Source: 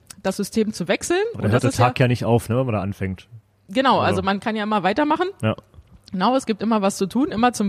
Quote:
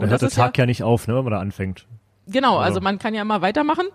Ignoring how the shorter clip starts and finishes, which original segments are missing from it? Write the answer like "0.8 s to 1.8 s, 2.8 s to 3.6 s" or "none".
none